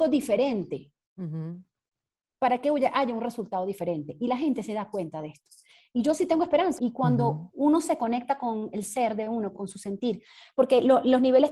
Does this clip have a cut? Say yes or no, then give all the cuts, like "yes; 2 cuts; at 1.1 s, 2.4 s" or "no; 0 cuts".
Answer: yes; 2 cuts; at 6.8 s, 9.5 s